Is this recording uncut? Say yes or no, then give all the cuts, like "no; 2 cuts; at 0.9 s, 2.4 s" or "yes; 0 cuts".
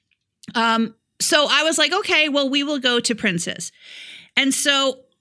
yes; 0 cuts